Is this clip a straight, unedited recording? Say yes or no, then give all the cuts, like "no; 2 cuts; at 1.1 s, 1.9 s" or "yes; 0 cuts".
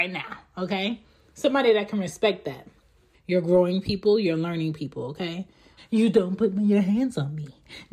no; 2 cuts; at 3.1 s, 5.8 s